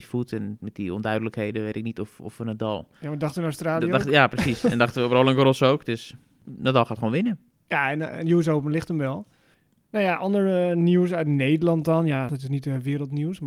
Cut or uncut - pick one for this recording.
uncut